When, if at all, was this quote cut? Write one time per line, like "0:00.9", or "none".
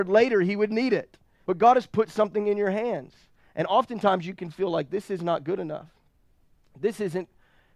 0:01.4